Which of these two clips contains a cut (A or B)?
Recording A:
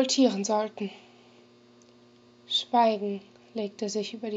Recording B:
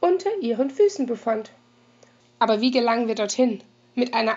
B